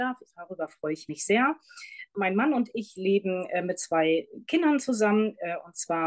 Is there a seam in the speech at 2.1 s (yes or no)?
no